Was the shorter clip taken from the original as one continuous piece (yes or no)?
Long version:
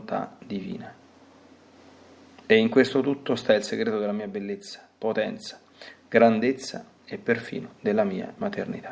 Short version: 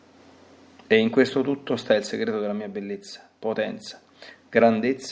yes